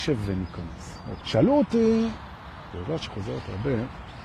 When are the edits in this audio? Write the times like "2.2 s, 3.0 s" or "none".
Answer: 1.2 s, 2.7 s